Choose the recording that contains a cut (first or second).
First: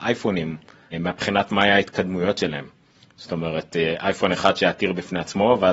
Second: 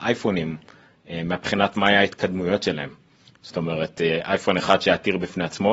first